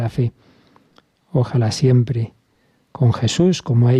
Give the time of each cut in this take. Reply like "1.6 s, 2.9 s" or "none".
none